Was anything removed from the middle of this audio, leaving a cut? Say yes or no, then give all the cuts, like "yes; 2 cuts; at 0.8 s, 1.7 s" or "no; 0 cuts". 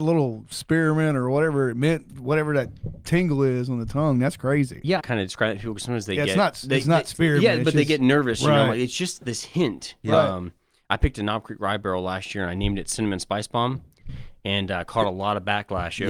yes; 1 cut; at 5.0 s